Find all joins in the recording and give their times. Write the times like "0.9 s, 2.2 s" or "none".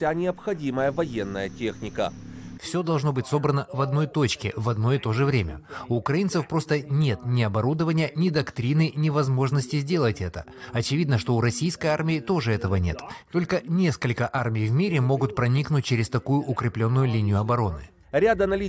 2.6 s